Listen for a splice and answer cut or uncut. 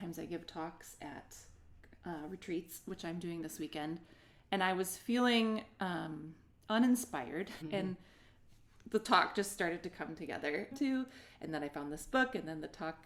cut